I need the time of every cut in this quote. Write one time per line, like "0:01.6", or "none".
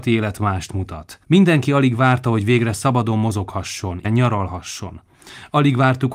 0:01.2
0:04.0

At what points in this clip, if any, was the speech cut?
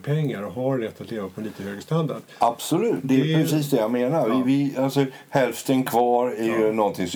0:03.0

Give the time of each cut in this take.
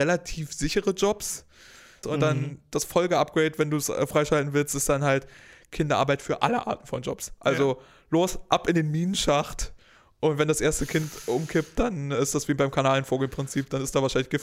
0:02.0

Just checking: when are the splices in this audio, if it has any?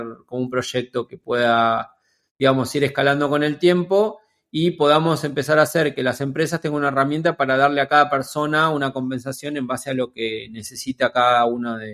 0:01.1

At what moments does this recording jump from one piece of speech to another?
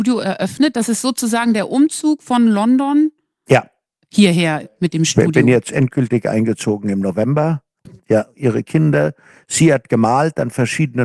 0:07.9

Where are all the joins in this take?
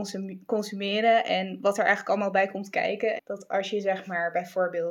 0:03.2

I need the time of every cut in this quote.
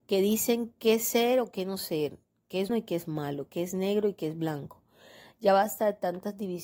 0:02.7

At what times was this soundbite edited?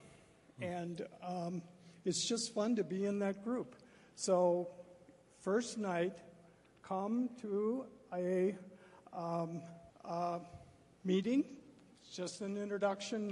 0:09.9

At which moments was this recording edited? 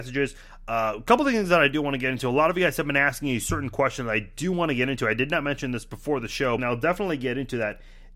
0:06.6

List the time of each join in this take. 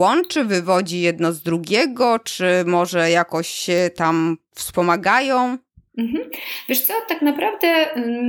none

